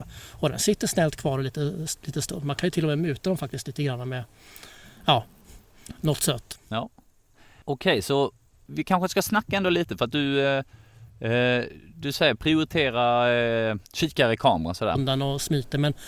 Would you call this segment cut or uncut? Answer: cut